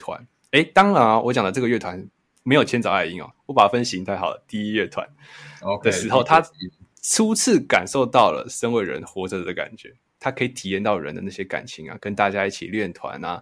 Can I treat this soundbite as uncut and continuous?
no; 1 cut; at 3.3 s

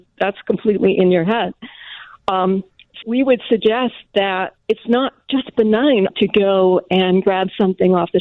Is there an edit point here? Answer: yes; 3 cuts; at 3.0 s, 4.6 s, 6.1 s

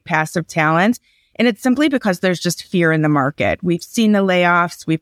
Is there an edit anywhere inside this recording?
no; 0 cuts

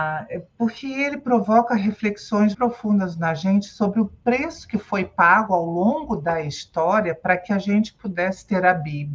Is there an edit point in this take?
yes; 1 cut; at 2.5 s

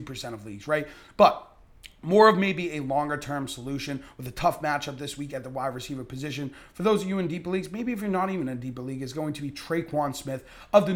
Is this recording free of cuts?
yes; 0 cuts

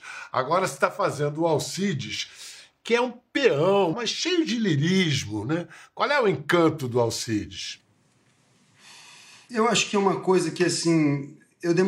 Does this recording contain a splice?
yes; 1 cut; at 3.9 s

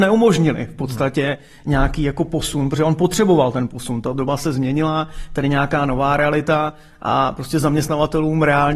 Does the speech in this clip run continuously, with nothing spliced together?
yes; 0 cuts

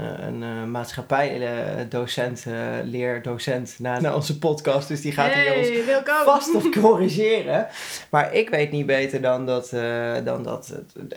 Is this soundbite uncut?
no; 1 cut; at 4.0 s

